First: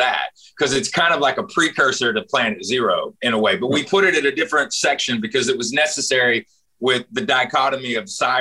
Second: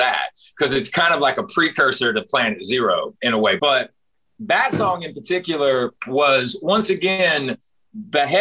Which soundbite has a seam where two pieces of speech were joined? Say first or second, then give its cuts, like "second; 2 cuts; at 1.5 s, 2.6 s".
second; 2 cuts; at 3.6 s, 6.0 s